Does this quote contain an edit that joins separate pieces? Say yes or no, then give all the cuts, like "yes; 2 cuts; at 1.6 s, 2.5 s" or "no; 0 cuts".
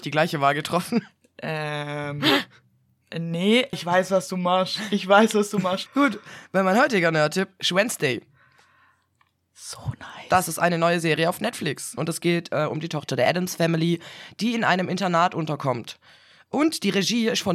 yes; 3 cuts; at 3.7 s, 5.9 s, 12.0 s